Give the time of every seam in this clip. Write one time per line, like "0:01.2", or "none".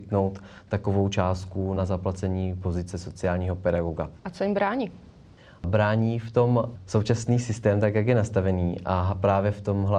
0:01.8
0:04.2